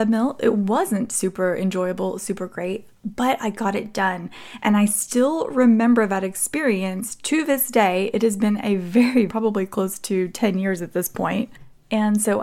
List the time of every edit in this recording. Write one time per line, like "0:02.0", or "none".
0:09.3